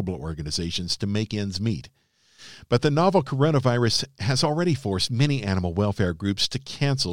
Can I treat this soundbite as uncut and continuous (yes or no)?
yes